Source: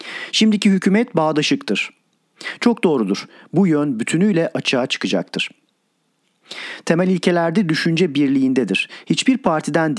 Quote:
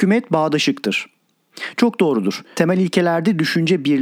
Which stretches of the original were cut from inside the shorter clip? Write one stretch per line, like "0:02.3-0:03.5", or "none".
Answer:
0:03.4-0:06.8